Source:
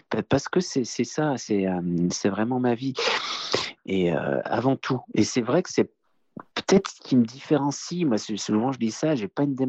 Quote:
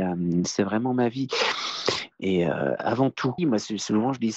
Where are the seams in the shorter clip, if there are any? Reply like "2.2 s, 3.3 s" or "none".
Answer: 3.4 s